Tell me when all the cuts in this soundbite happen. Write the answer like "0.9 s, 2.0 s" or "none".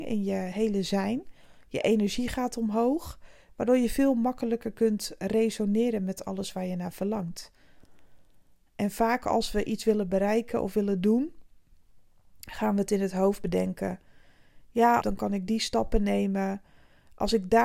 15.0 s